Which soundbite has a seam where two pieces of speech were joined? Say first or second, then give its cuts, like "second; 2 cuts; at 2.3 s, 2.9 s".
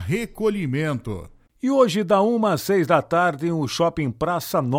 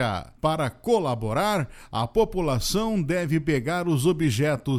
first; 1 cut; at 1.5 s